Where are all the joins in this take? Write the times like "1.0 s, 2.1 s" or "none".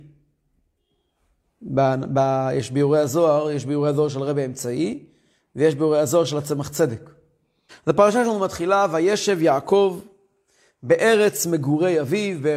7.7 s